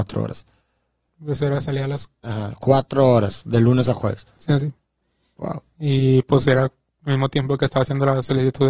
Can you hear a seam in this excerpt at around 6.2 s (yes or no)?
no